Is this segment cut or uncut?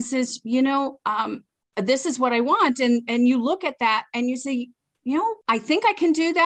cut